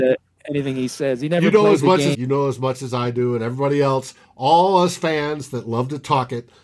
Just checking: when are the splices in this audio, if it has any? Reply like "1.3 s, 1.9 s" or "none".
2.1 s